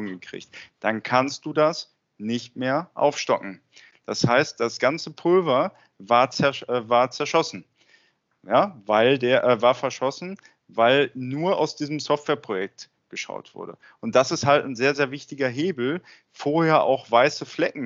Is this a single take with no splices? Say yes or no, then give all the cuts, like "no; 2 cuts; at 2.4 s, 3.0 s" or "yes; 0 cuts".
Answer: yes; 0 cuts